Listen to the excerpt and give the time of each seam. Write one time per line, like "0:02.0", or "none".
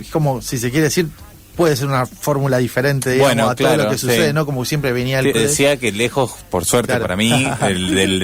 0:05.3